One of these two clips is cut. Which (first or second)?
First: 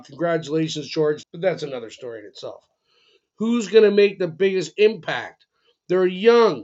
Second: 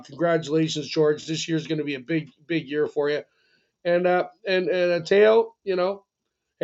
first